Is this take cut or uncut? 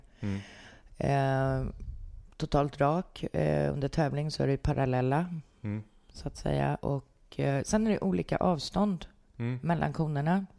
uncut